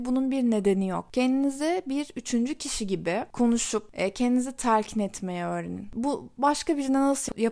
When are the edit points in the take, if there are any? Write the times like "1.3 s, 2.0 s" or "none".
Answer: none